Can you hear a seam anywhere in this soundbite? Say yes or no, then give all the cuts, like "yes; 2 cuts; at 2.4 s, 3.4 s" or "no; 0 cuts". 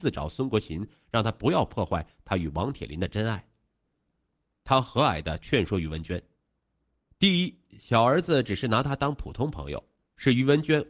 yes; 1 cut; at 4.6 s